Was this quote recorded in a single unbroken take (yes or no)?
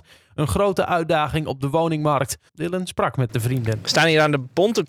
no